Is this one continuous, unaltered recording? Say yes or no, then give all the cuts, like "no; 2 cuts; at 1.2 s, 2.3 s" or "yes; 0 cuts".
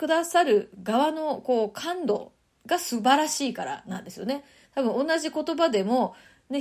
yes; 0 cuts